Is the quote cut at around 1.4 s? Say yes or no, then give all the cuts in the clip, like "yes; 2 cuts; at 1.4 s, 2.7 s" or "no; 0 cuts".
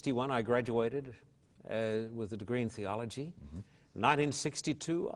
no; 0 cuts